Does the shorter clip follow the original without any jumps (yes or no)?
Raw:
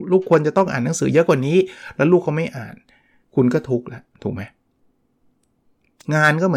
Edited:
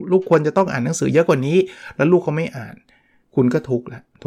yes